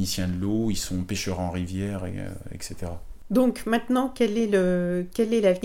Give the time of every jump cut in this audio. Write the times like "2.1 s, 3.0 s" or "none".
none